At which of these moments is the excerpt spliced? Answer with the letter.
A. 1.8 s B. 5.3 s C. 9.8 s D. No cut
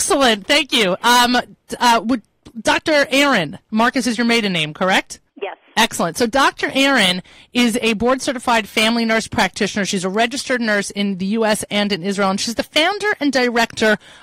B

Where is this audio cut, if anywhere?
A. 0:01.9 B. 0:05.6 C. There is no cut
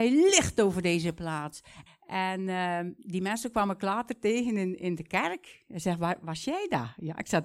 A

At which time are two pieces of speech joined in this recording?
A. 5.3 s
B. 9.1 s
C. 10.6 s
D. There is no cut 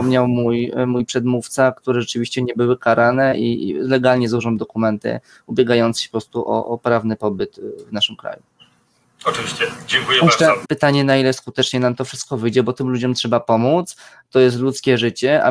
C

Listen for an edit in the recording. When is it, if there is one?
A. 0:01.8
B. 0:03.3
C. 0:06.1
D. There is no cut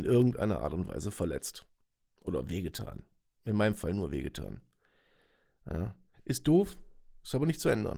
C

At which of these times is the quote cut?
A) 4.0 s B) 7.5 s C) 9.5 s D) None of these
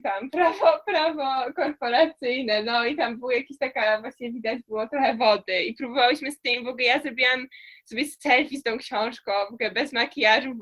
D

